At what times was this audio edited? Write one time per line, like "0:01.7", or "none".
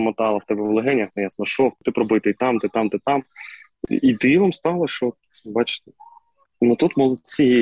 0:03.9